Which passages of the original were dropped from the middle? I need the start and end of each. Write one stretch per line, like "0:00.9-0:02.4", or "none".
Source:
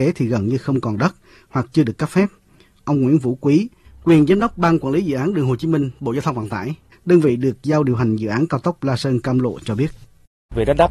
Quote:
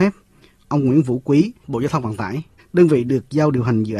0:03.8-0:06.0